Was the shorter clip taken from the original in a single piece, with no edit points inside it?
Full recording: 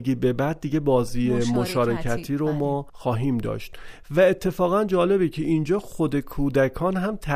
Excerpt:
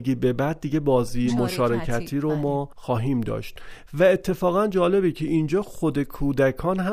no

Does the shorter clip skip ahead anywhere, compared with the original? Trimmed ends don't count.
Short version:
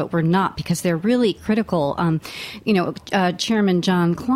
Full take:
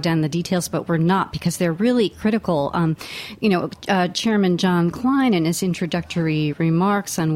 no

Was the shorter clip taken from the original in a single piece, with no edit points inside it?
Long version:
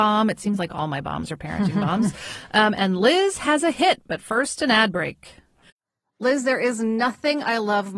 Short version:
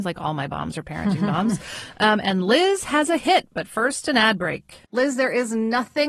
no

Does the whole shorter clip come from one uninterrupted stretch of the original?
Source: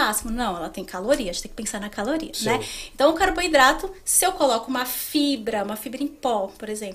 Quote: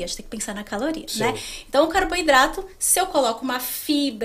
yes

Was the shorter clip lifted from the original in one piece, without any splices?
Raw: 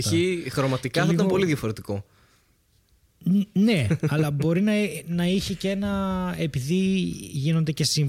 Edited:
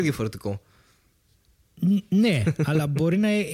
yes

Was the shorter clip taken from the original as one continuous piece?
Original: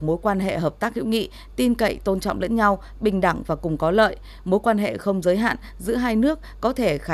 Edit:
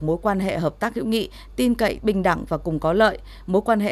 no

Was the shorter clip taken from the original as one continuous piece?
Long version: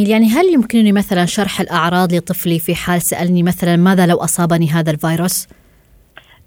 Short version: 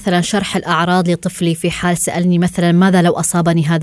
yes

